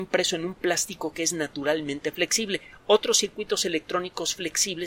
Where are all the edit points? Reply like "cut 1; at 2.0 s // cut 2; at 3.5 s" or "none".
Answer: none